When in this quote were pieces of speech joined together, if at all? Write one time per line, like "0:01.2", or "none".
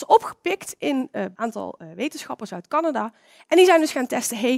0:01.3